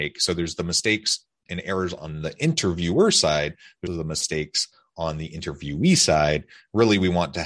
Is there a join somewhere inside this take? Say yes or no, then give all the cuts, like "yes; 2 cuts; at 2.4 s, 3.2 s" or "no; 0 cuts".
yes; 1 cut; at 3.9 s